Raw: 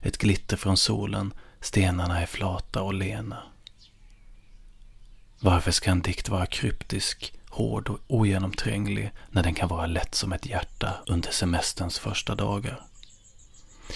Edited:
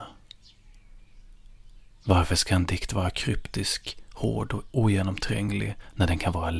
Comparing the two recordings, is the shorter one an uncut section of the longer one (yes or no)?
yes